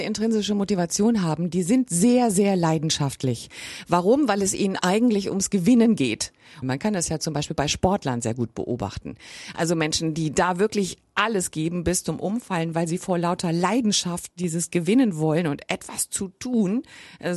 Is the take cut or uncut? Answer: cut